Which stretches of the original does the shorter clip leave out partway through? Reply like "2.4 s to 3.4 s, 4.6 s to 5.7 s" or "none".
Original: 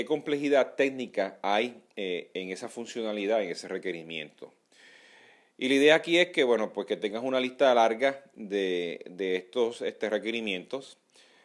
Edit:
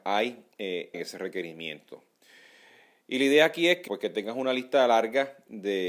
2.3 s to 3.4 s, 6.4 s to 6.7 s